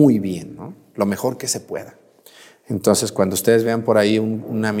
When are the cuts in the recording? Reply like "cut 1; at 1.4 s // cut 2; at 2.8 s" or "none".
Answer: none